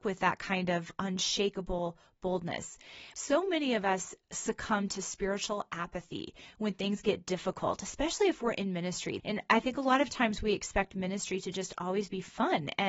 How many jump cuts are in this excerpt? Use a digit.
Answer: 2